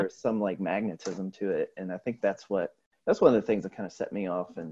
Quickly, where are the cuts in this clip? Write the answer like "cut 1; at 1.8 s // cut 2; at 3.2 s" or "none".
none